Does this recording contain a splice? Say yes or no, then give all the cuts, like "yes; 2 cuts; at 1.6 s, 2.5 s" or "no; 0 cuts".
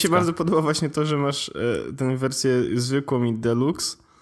no; 0 cuts